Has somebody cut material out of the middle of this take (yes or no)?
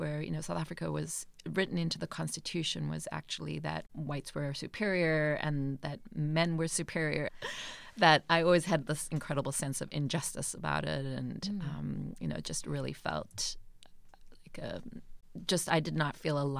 yes